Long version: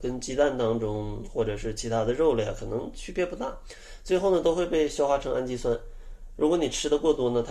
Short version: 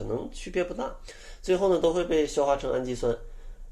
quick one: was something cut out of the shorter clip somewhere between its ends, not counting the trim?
no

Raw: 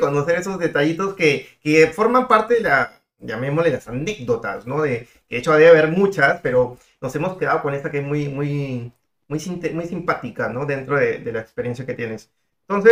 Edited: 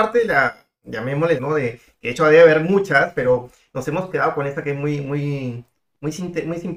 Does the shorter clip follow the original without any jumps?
no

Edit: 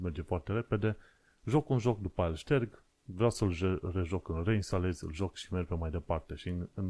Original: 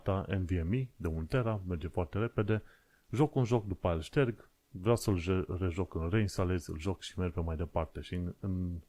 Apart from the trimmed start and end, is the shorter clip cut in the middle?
no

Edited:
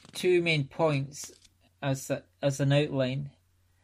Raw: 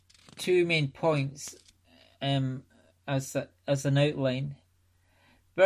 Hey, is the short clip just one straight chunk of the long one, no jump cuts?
no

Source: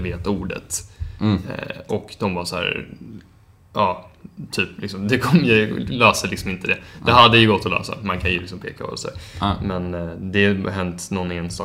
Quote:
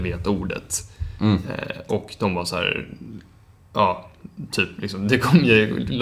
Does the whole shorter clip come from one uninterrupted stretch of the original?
yes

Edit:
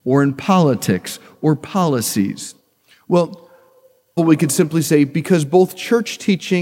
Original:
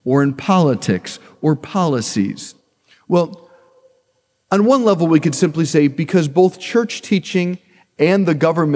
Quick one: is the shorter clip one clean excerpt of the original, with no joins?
no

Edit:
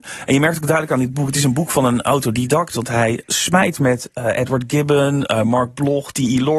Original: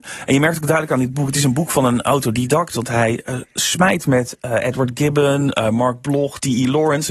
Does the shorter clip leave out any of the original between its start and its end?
yes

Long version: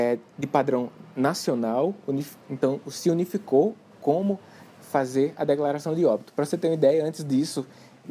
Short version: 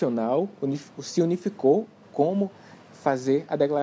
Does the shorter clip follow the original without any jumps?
no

